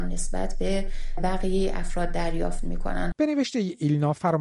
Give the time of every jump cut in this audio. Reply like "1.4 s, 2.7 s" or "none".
3.1 s